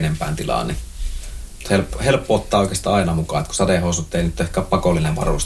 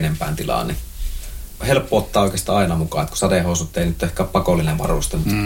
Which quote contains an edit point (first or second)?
second